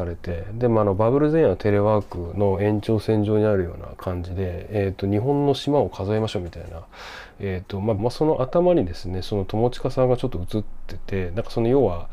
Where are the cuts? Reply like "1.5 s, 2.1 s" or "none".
8.0 s